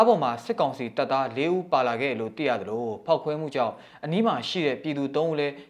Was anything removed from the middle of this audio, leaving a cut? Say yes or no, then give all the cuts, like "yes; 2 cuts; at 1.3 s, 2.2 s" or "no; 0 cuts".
no; 0 cuts